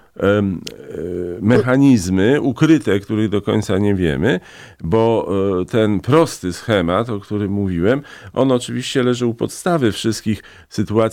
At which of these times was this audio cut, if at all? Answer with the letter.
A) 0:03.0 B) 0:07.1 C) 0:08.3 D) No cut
D